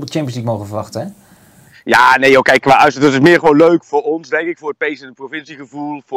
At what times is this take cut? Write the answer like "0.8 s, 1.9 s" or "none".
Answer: 2.6 s